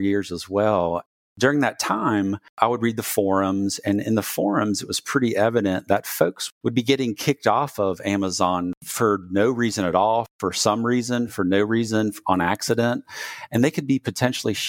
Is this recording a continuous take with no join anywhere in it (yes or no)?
yes